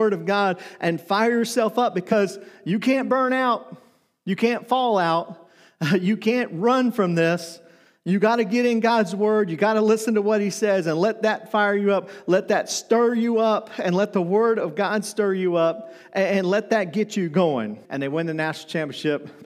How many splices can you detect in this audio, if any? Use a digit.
1